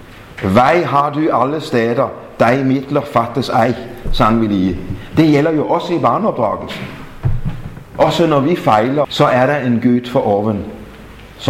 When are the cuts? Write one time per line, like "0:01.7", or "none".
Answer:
0:09.0